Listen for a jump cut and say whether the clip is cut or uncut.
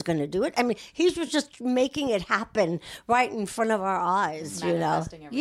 uncut